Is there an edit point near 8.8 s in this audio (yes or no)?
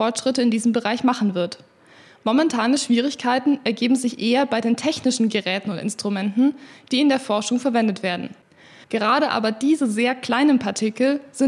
yes